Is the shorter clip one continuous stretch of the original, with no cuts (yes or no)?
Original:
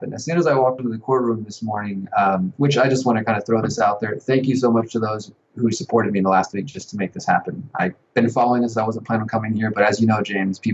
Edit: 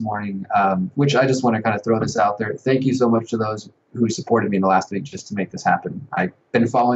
yes